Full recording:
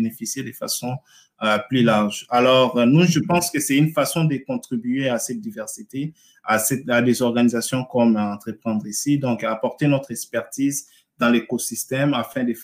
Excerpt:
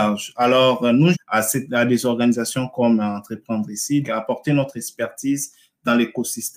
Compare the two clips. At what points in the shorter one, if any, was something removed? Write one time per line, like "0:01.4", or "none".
0:01.1
0:04.0